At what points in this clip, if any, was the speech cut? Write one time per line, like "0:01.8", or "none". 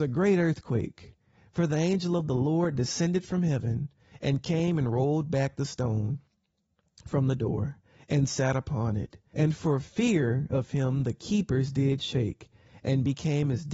0:09.3